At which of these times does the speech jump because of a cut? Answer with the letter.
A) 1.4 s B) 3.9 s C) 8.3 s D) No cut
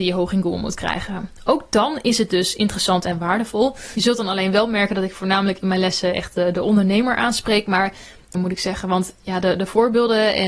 C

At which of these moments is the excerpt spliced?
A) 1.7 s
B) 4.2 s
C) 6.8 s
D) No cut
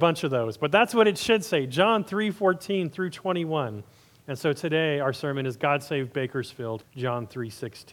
C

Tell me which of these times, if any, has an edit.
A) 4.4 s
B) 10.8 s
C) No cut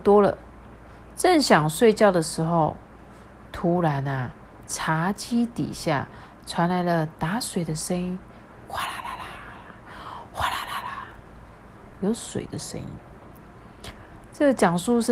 B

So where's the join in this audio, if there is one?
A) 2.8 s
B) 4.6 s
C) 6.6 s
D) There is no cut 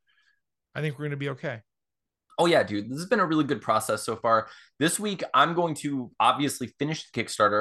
D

